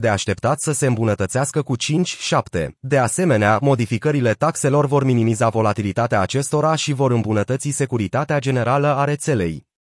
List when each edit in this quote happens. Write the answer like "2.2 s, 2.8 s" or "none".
2.8 s